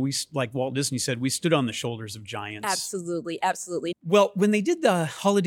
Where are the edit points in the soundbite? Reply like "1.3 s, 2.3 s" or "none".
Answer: 3.9 s